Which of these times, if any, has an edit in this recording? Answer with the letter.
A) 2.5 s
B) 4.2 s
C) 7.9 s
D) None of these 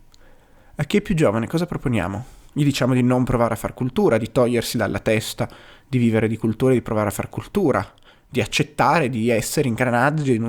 D